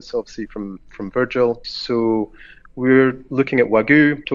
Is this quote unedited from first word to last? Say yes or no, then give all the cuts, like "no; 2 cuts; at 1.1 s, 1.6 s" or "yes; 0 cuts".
no; 1 cut; at 1.6 s